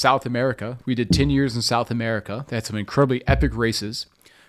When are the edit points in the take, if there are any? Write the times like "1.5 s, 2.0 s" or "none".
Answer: none